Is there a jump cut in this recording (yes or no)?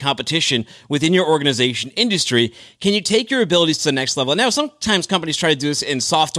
no